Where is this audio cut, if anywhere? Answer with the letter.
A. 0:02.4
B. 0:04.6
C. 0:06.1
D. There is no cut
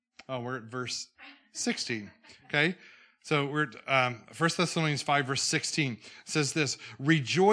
D